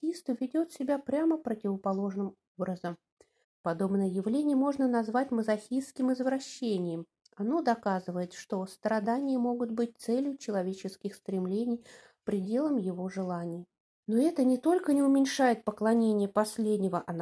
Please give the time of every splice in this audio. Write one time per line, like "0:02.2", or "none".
0:03.4
0:14.0